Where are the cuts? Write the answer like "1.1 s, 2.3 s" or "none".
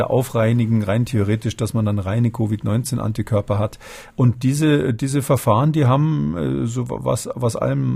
4.1 s